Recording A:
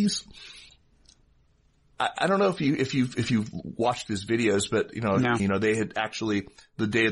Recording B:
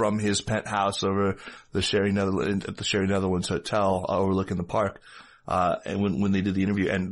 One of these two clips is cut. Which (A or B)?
A